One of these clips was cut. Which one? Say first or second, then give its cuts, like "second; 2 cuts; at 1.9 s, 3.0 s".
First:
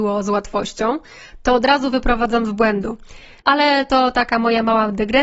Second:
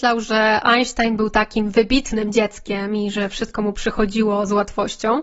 first; 1 cut; at 3.4 s